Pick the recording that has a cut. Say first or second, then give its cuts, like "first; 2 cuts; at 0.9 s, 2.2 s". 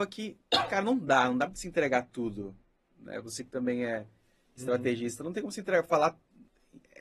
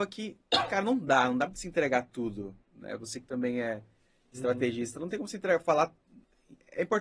second; 1 cut; at 2.6 s